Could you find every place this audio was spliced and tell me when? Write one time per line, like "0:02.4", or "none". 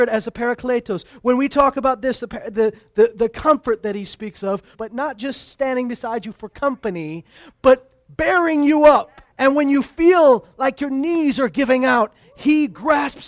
0:04.7
0:09.3